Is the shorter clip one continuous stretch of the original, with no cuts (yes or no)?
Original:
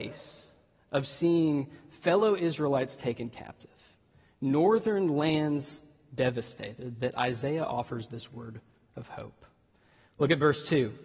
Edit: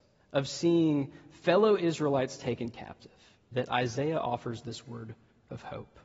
no